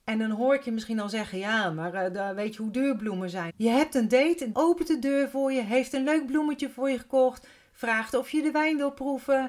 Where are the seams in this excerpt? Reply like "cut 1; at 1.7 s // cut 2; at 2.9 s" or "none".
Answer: cut 1; at 3.5 s // cut 2; at 4.5 s